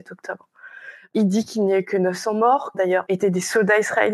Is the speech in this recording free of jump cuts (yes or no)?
no